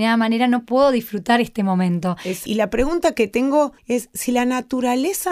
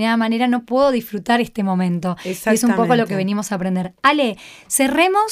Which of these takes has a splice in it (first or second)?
first